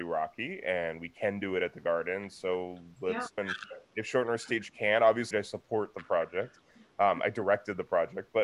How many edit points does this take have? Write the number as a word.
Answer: two